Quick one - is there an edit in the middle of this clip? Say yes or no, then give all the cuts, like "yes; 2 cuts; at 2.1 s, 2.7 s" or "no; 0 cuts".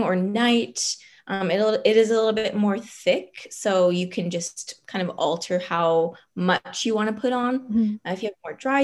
no; 0 cuts